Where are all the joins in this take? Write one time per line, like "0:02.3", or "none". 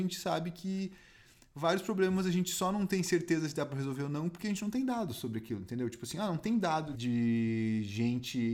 0:06.9

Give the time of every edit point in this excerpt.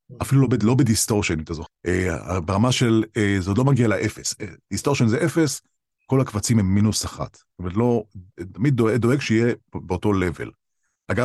0:01.7

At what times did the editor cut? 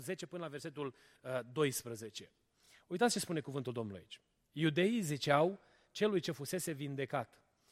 none

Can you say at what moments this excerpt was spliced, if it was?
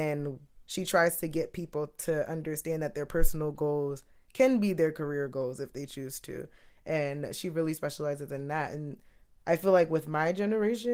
none

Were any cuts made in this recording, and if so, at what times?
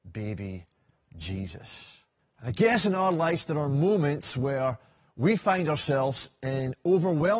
0:02.2

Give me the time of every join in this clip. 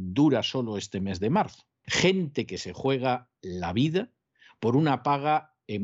0:01.8

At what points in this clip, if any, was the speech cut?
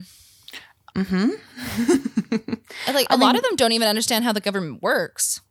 0:00.9

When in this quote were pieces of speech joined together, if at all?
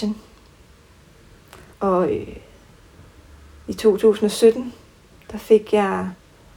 0:01.7

